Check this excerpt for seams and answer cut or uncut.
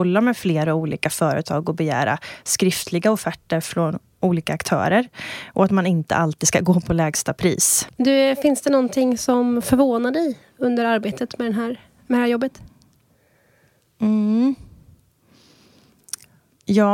cut